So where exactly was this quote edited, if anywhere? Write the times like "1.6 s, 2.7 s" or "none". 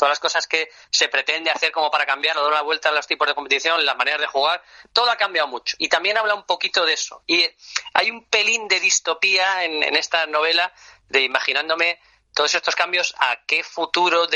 none

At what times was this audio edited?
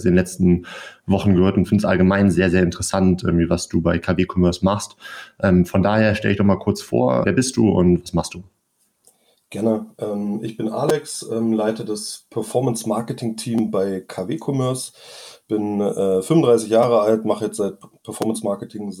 7.2 s

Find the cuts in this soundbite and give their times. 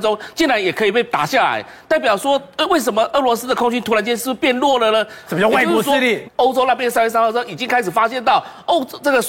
5.2 s, 6.2 s

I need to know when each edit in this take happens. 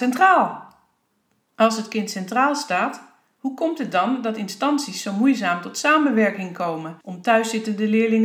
1.4 s, 7.0 s

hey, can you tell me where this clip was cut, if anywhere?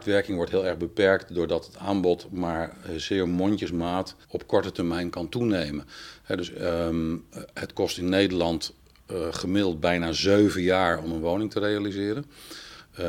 4.2 s

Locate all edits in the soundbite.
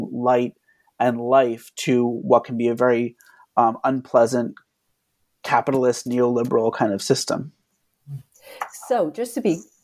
none

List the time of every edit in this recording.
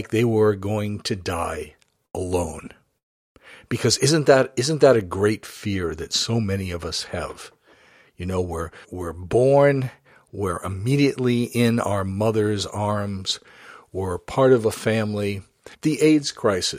8.8 s, 15.7 s

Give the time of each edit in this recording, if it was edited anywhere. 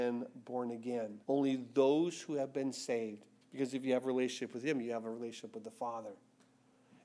1.2 s, 3.4 s

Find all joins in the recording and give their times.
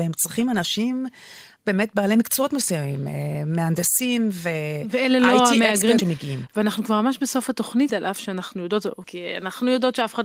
6.0 s, 7.9 s, 9.0 s

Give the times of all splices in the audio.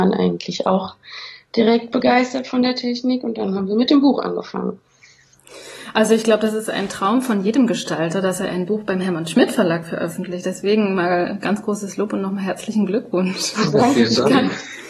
none

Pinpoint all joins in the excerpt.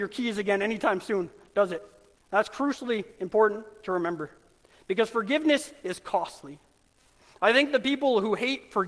2.2 s

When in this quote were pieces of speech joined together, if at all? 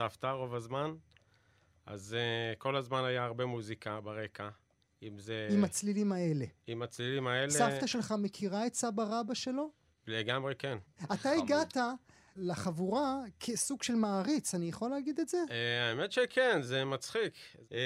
none

